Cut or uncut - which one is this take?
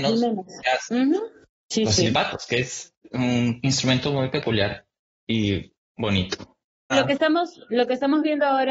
cut